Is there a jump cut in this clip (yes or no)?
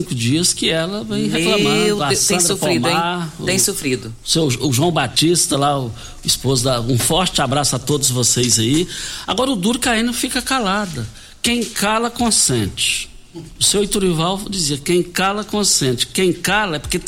no